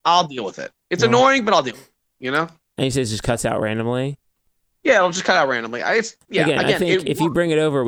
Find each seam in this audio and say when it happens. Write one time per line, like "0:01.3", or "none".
none